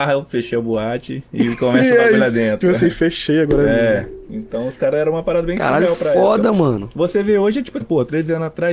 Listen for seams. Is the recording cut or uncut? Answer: cut